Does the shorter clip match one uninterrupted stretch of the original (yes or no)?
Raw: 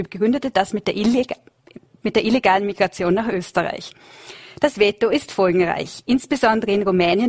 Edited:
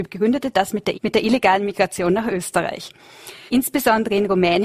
no